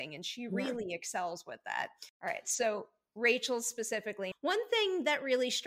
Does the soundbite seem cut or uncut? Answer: cut